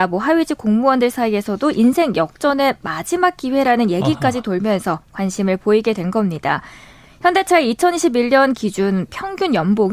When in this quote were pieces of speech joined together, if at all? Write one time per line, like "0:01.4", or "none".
none

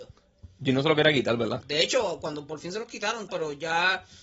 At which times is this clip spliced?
0:01.6
0:03.3

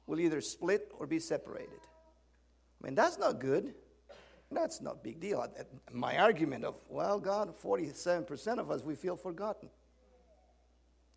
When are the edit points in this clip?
0:04.5

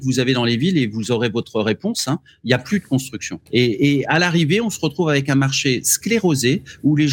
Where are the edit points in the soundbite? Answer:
0:03.5

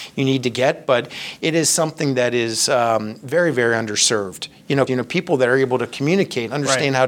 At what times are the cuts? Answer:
0:04.9

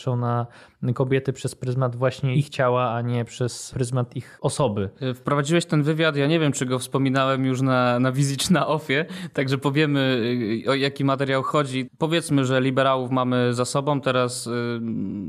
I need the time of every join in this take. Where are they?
0:11.9

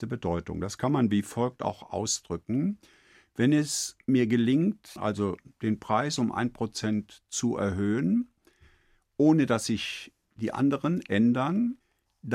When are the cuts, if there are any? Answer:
0:05.0

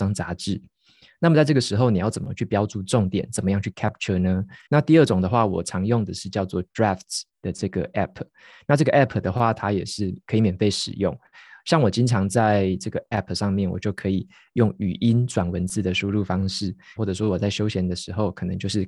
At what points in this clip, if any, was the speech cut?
0:04.7
0:17.0

